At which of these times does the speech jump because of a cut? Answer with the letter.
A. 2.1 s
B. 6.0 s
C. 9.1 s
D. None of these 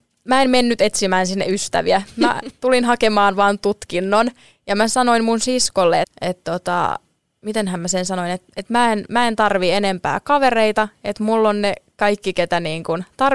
B